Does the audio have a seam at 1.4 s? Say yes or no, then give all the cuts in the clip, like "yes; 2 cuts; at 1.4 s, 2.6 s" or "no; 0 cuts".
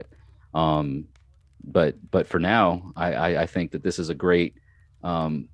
no; 0 cuts